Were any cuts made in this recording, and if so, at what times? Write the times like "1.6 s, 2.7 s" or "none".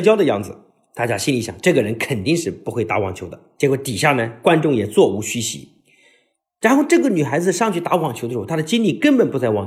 none